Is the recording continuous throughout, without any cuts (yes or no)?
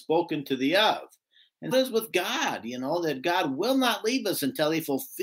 no